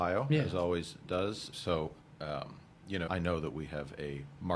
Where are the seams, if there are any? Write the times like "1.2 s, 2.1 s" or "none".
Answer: 1.5 s, 3.1 s